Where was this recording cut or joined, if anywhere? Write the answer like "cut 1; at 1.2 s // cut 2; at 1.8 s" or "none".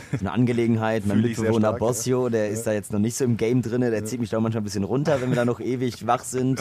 none